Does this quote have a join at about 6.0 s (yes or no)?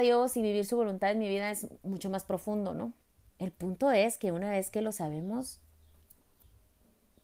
no